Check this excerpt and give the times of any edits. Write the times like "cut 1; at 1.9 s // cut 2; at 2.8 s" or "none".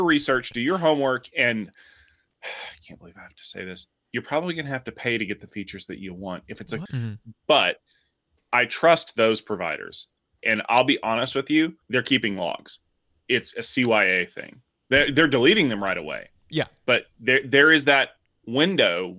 cut 1; at 6.9 s // cut 2; at 10.4 s // cut 3; at 11.8 s

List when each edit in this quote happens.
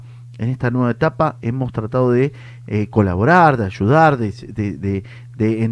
none

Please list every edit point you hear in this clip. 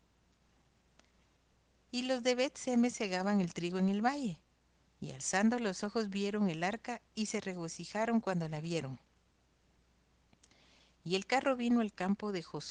none

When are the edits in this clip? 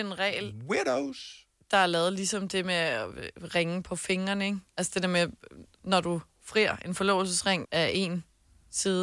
cut 1; at 7.6 s

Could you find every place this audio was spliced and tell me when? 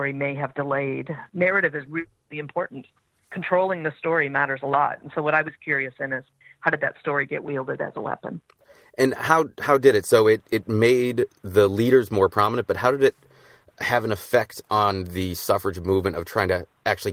cut 1; at 1.3 s

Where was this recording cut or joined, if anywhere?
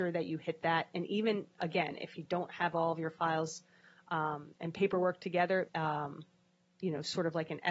cut 1; at 5.7 s

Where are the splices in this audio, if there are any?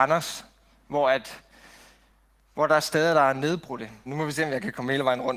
cut 1; at 4.1 s

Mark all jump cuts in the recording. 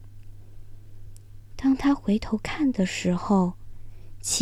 none

